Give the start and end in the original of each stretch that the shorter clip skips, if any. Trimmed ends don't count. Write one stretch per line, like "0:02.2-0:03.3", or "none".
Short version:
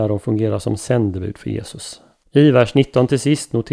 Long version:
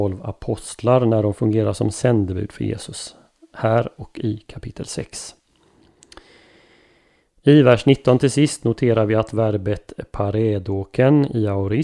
0:03.4-0:07.3